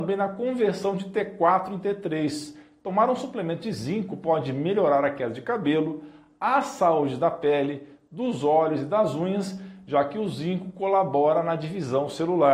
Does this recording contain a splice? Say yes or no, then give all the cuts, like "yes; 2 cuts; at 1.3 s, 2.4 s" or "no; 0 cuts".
no; 0 cuts